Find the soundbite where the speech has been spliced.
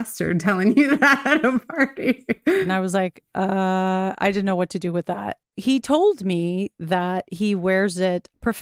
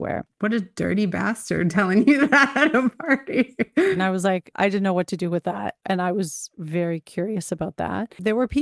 second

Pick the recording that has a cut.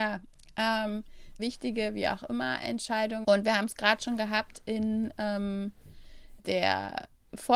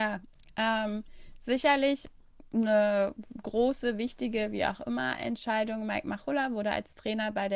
first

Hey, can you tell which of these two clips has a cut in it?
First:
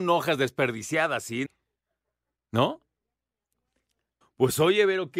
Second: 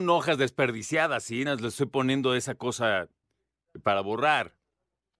first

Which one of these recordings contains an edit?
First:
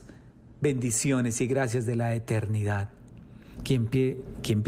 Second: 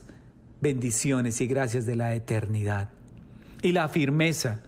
first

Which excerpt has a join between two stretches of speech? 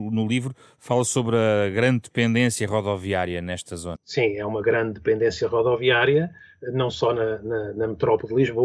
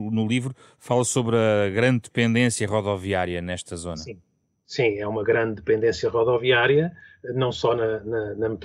first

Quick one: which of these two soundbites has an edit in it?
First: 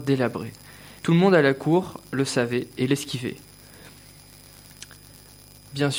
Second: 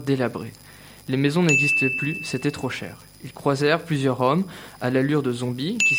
first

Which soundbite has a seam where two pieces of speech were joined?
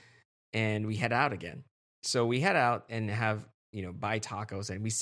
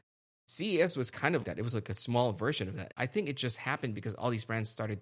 second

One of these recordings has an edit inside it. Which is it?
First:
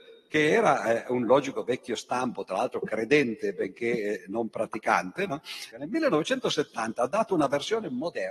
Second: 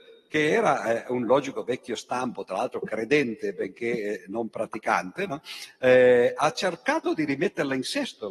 first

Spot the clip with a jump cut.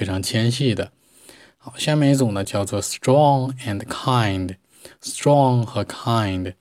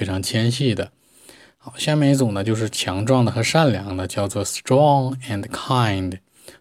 first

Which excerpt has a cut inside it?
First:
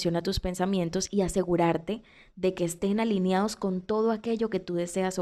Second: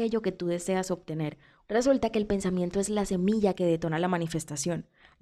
second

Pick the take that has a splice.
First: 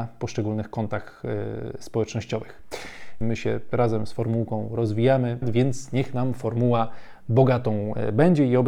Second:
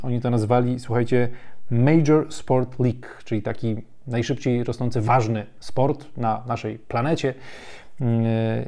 first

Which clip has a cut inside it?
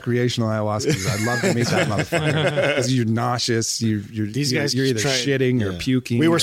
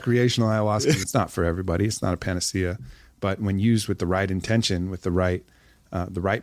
second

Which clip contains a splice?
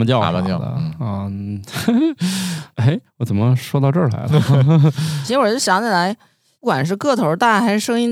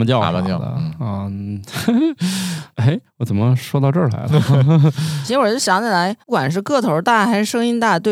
second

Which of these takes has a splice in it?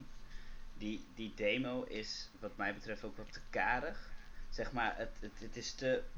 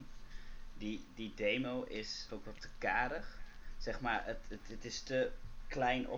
second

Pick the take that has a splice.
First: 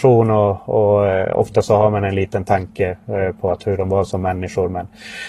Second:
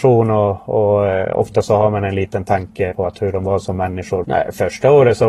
second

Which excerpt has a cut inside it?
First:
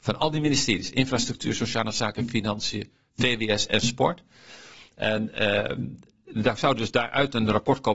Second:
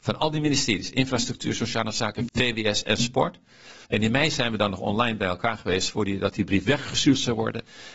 second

